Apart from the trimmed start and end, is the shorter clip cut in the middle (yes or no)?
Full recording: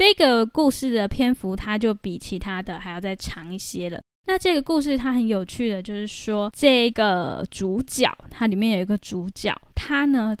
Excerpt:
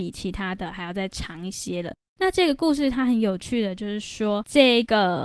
no